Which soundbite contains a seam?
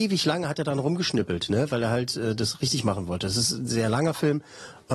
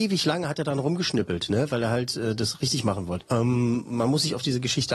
second; 1 cut; at 3.2 s

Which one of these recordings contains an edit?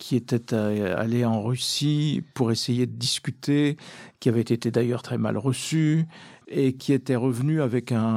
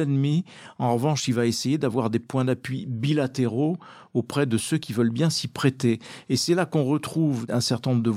first; 1 cut; at 5.0 s

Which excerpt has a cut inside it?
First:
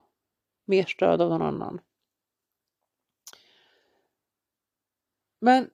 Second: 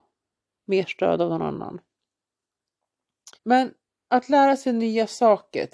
second; 1 cut; at 3.4 s

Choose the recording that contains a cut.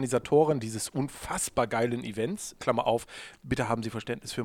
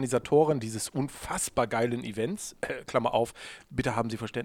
first; 1 cut; at 2.6 s

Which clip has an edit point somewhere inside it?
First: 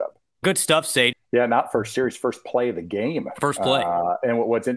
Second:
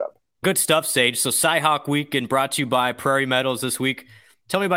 first; 1 cut; at 1.1 s

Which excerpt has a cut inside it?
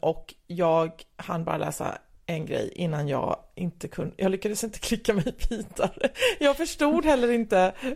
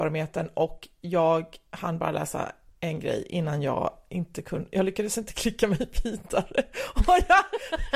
first; 1 cut; at 6.1 s

